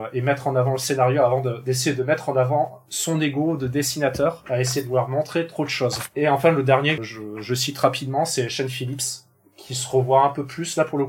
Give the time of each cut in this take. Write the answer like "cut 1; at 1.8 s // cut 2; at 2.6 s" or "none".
cut 1; at 7.0 s